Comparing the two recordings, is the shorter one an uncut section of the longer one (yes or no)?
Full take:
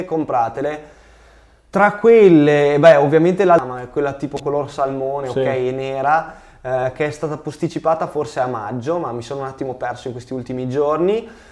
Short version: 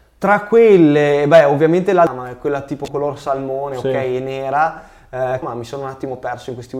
no